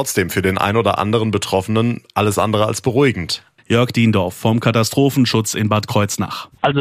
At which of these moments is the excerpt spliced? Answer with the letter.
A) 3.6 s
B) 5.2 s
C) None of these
A